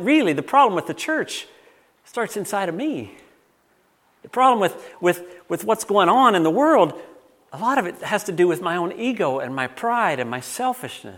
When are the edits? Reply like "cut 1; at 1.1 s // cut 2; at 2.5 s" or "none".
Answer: none